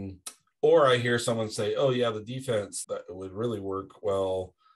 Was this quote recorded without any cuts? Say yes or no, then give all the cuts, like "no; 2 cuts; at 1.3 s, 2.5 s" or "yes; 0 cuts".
no; 1 cut; at 2.8 s